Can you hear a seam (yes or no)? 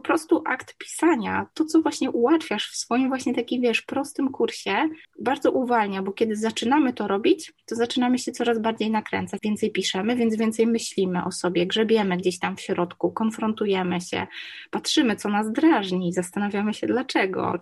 yes